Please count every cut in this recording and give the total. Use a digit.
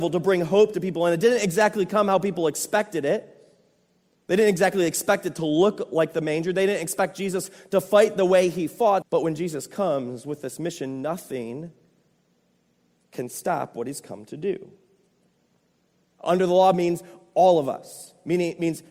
2